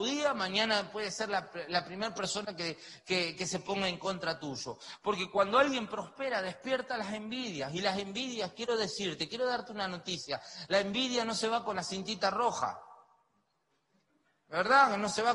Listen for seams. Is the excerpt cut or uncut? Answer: uncut